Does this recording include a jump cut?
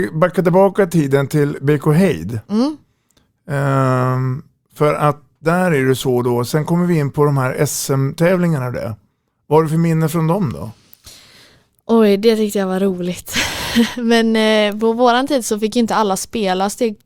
no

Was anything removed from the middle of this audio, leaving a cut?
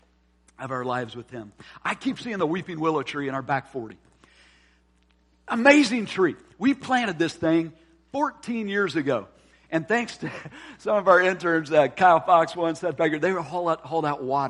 no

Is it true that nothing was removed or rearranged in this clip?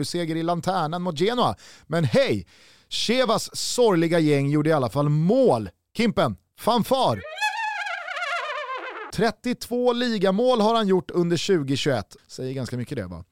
no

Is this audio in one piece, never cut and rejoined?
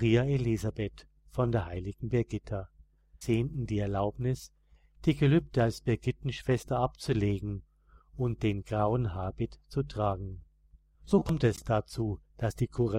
no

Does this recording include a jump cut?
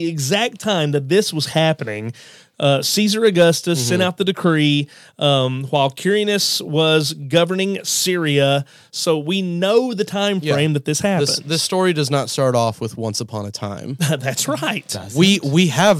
no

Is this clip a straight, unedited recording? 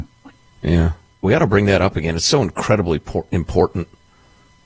no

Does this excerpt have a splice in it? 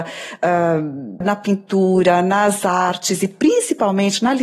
yes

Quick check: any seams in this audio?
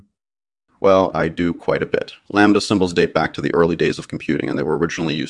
yes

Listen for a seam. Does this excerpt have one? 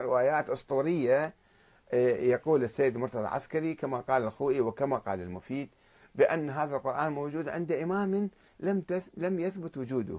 no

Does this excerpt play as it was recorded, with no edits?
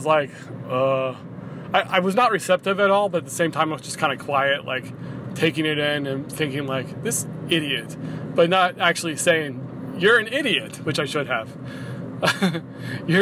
yes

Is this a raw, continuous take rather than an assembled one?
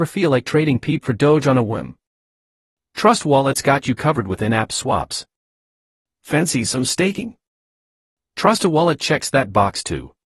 yes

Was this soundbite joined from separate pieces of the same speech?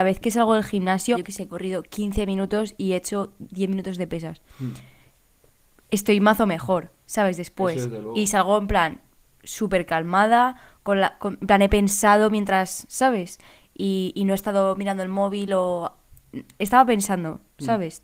yes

